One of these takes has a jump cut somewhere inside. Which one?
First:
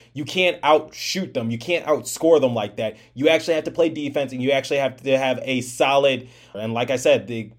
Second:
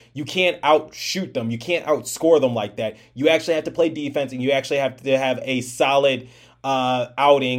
first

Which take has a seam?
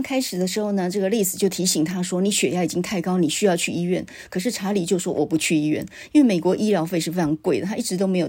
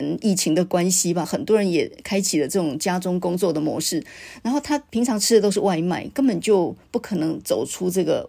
second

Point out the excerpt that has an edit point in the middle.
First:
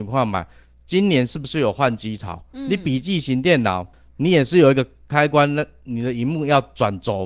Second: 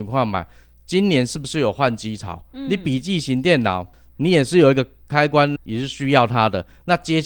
second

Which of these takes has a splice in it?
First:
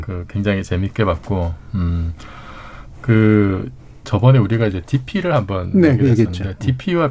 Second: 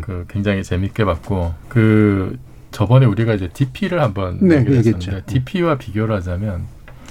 second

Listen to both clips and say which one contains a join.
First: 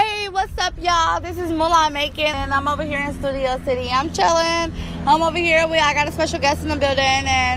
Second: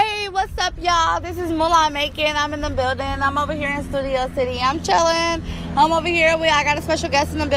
first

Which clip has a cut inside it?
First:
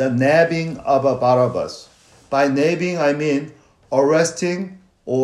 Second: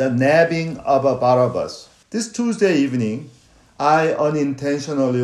second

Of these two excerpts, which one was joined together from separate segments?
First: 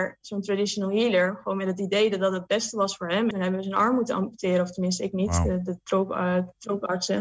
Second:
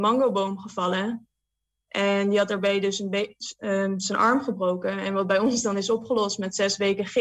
first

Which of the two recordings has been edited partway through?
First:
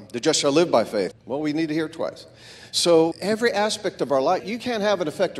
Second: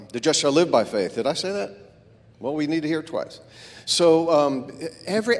first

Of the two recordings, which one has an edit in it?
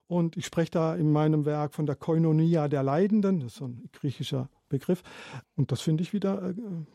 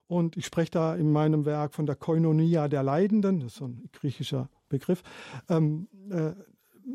first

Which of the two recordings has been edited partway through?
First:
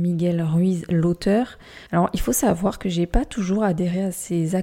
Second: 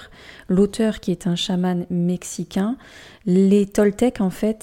first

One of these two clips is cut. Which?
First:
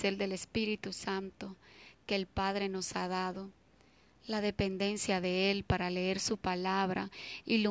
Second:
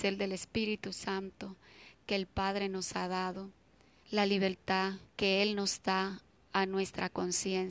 second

